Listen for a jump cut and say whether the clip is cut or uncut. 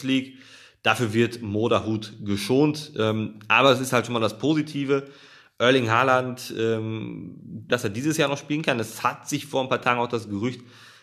cut